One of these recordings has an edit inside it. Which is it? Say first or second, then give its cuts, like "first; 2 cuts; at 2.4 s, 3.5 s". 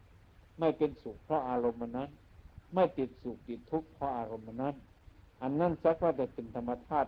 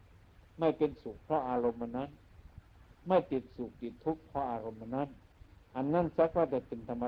first; 1 cut; at 2.6 s